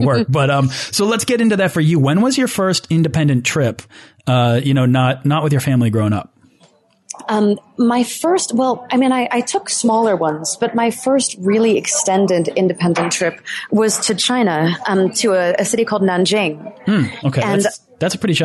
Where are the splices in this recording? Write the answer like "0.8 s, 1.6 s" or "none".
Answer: none